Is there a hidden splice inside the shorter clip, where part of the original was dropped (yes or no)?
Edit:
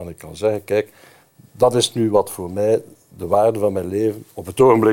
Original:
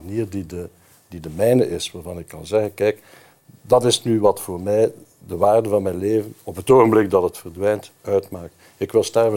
no